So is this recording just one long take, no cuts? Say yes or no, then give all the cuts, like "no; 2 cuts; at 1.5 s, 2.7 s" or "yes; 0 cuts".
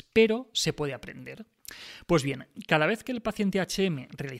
yes; 0 cuts